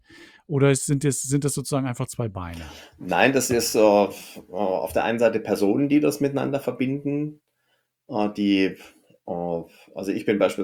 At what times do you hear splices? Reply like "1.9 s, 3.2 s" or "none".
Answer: none